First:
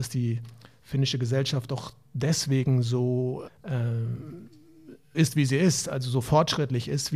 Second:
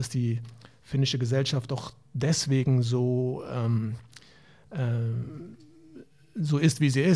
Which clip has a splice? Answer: first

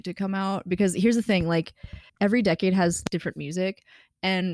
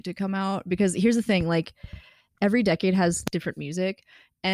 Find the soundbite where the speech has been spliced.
first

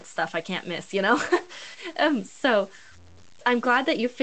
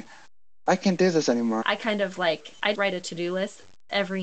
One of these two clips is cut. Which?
second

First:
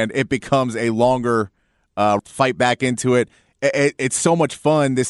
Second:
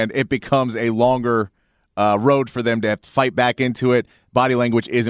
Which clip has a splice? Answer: first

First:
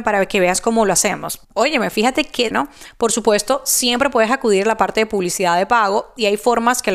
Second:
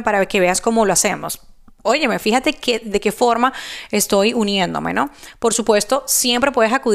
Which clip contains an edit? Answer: first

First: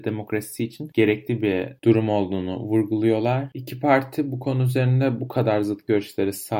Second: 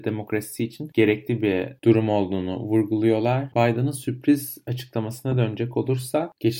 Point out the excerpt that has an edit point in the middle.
second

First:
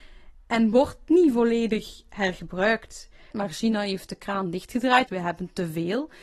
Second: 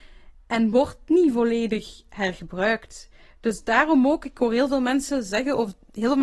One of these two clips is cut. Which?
first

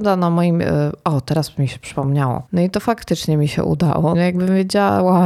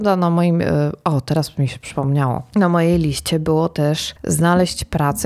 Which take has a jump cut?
first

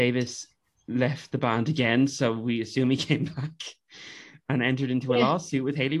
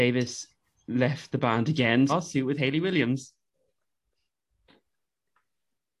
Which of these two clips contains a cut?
second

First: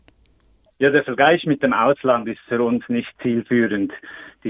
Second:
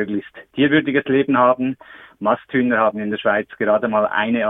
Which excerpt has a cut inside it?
second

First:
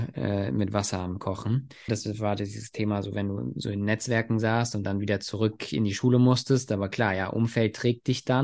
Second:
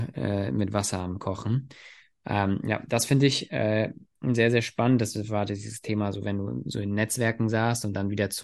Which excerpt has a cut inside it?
first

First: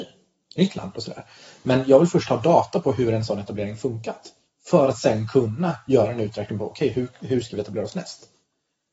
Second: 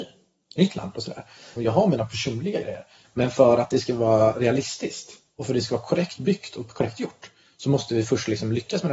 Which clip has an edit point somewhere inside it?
second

